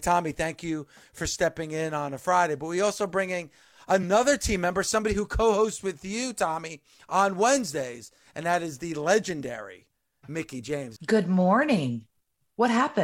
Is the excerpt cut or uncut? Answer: cut